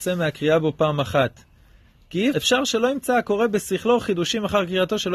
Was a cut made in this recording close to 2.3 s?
yes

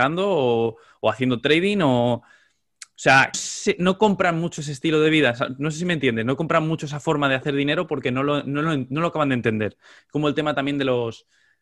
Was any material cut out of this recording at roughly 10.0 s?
no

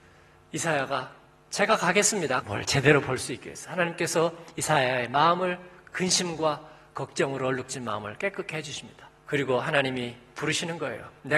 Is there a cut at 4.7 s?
no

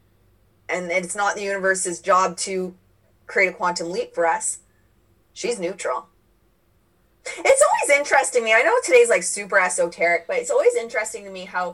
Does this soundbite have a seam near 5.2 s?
yes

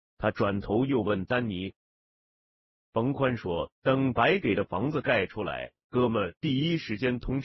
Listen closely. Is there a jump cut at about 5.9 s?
no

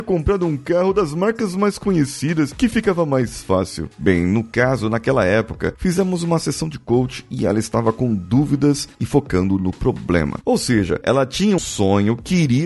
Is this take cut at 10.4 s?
yes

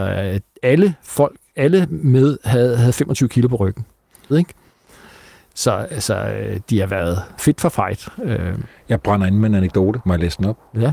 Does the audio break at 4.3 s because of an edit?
yes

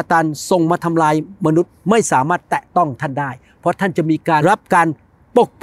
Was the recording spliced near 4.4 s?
yes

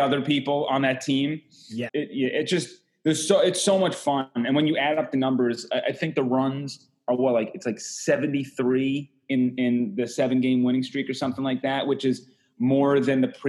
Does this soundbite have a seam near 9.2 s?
no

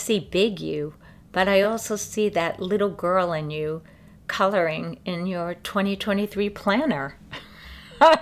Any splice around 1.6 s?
no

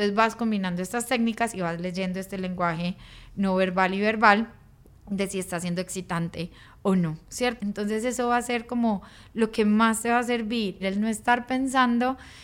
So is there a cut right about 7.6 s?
yes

